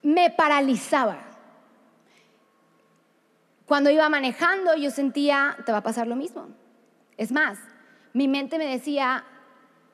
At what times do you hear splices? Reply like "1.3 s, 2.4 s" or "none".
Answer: none